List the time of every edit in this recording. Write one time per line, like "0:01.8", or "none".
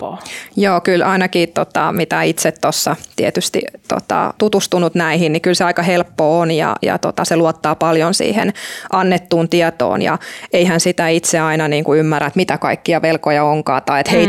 0:04.4